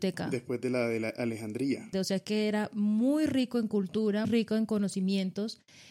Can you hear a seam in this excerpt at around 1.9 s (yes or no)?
yes